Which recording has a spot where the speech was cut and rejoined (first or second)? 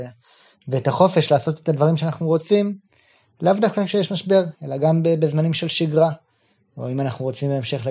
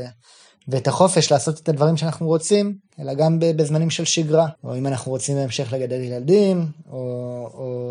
second